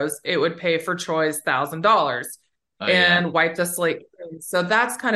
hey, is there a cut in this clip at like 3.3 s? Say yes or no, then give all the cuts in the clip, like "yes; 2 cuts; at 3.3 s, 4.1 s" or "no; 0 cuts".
no; 0 cuts